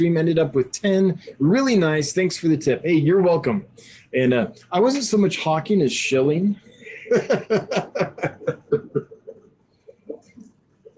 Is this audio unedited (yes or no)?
yes